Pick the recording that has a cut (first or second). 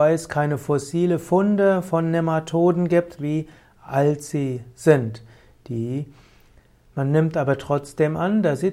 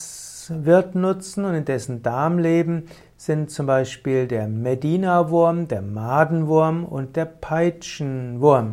first